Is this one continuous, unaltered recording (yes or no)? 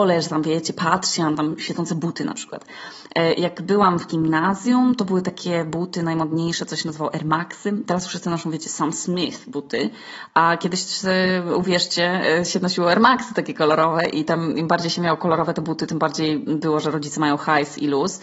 yes